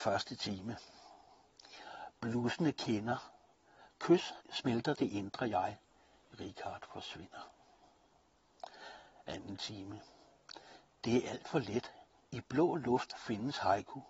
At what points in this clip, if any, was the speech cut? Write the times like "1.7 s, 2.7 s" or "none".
4.4 s